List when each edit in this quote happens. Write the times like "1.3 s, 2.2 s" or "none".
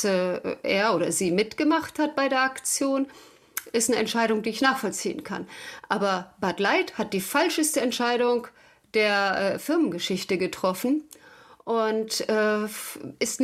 none